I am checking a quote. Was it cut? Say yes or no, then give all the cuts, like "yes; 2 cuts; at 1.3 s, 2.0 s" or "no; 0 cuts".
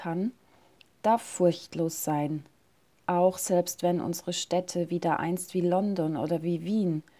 no; 0 cuts